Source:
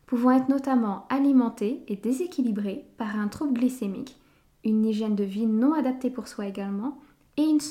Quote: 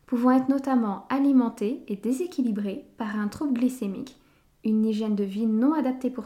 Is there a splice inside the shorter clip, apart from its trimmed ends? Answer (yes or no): no